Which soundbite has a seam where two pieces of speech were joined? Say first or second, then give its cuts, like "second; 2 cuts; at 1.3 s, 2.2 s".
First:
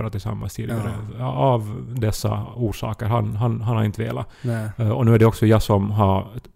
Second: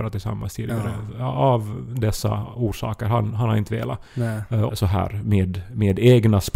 second; 2 cuts; at 3.3 s, 4.7 s